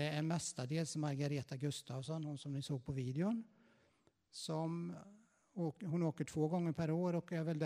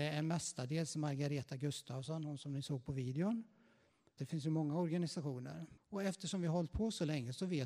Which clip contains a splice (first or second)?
second